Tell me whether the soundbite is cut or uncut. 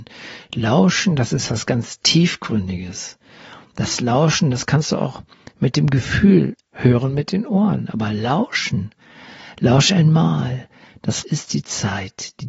cut